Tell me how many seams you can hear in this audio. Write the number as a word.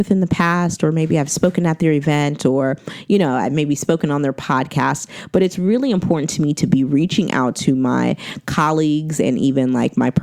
zero